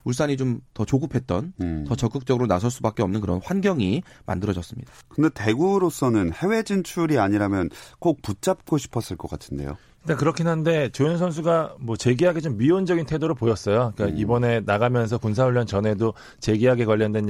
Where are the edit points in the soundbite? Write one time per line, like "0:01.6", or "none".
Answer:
0:05.0